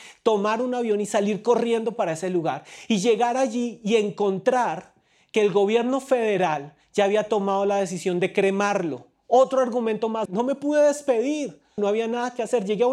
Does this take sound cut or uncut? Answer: cut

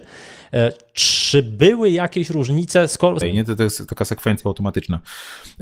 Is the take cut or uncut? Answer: cut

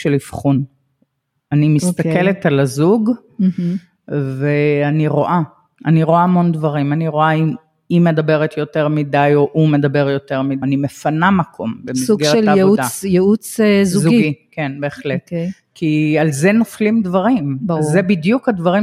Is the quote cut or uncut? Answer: cut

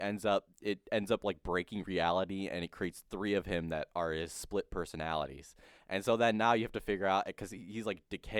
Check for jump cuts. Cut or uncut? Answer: uncut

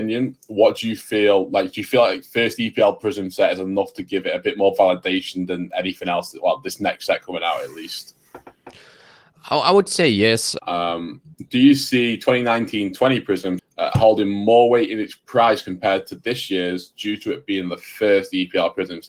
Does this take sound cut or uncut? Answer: cut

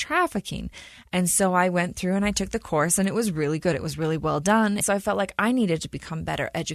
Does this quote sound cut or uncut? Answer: cut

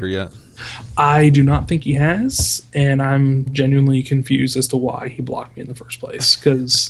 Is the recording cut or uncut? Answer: cut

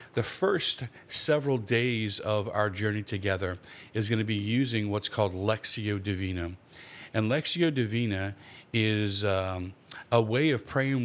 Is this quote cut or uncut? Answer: uncut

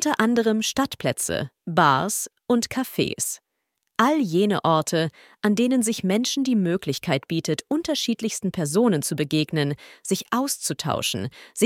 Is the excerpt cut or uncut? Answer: uncut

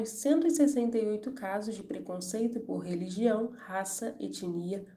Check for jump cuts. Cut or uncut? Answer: uncut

